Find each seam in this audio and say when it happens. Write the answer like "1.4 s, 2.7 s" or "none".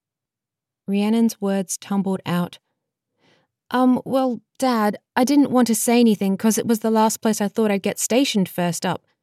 none